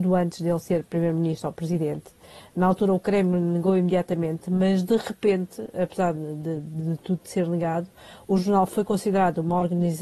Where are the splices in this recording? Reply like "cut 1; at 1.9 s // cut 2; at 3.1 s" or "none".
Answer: cut 1; at 6.1 s